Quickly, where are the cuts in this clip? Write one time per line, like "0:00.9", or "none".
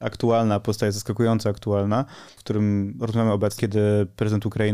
0:02.4
0:03.6